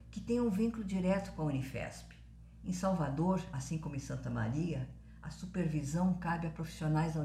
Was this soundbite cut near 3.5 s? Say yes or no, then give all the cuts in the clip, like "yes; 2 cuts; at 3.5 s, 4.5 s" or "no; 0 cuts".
no; 0 cuts